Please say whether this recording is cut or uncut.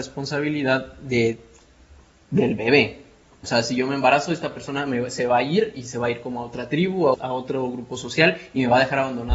cut